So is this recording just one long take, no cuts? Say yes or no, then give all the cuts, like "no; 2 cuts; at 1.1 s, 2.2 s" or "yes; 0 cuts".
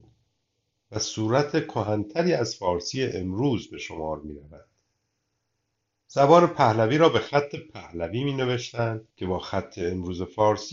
no; 1 cut; at 9.1 s